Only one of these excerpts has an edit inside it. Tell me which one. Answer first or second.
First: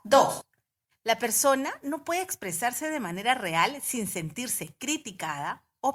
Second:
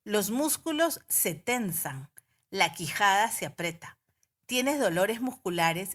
first